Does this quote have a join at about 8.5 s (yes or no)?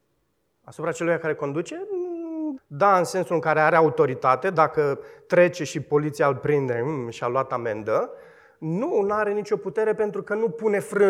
no